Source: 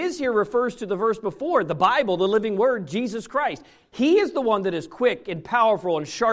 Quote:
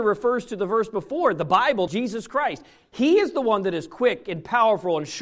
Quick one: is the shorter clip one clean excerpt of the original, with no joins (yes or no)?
no